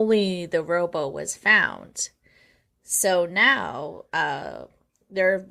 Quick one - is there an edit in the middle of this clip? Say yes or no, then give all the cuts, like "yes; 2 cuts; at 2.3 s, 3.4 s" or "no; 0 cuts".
no; 0 cuts